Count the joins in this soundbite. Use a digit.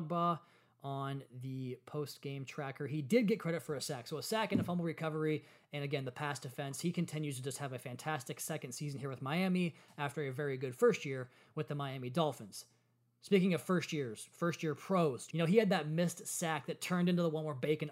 1